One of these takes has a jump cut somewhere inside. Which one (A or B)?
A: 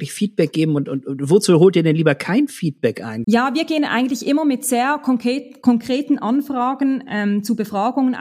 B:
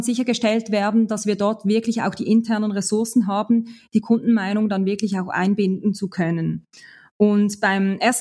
A